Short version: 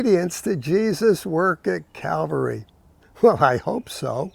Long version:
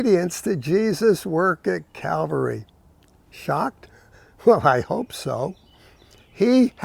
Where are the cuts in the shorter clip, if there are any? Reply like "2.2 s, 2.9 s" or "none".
3.0 s